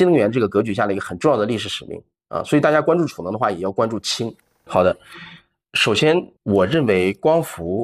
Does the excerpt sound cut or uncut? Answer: cut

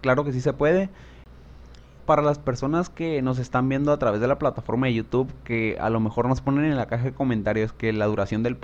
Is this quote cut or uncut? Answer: cut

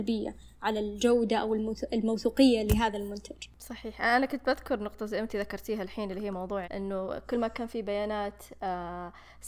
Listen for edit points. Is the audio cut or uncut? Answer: cut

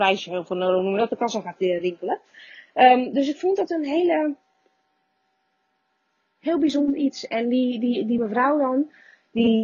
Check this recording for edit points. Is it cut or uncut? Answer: uncut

